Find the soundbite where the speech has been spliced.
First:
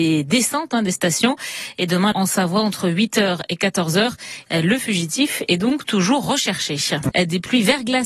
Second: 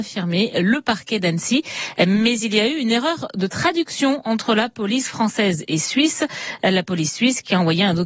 first; 3 cuts; at 2.1 s, 4.5 s, 7.1 s

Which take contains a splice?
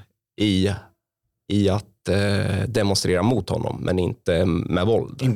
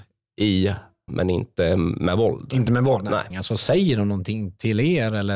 second; 2 cuts; at 1.1 s, 3.3 s

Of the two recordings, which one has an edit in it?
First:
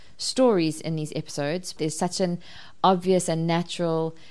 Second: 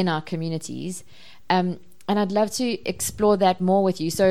first; 1 cut; at 1.8 s

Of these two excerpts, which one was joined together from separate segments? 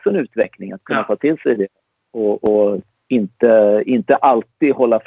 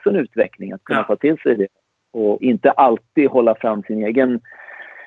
second; 1 cut; at 2.4 s

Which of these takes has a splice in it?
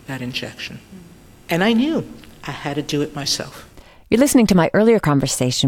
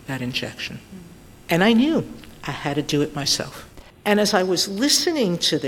second; 1 cut; at 3.9 s

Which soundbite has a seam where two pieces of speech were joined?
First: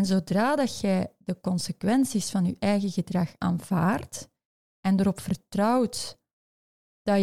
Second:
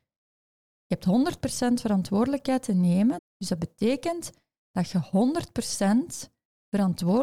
second; 1 cut; at 3.2 s

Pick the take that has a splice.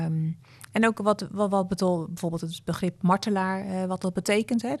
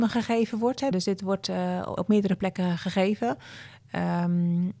second; 2 cuts; at 0.9 s, 2.0 s

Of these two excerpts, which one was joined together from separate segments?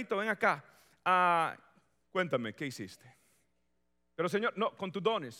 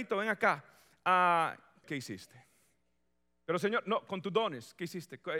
second; 1 cut; at 1.8 s

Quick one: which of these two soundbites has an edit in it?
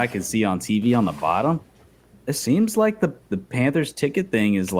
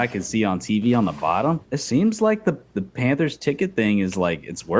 second; 1 cut; at 1.6 s

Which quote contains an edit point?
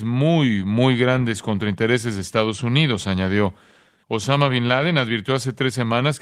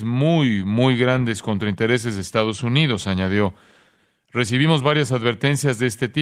first; 1 cut; at 4.0 s

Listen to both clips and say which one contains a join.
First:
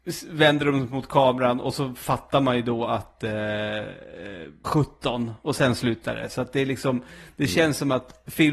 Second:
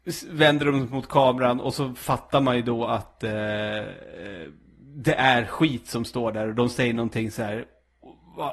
first; 1 cut; at 4.6 s

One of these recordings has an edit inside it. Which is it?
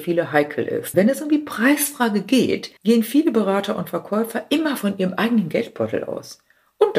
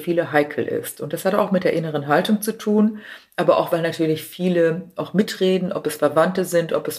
first; 2 cuts; at 0.9 s, 2.8 s

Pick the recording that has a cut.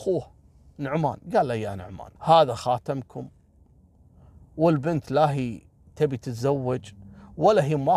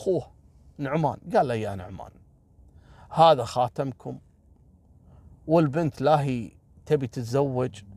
first; 1 cut; at 2.2 s

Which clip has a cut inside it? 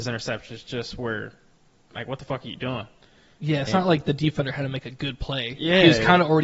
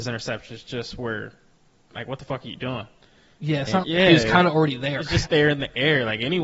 second; 2 cuts; at 3.8 s, 5.3 s

